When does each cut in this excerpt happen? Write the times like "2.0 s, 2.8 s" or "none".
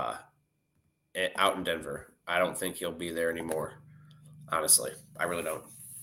none